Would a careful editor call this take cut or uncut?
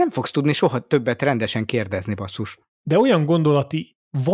uncut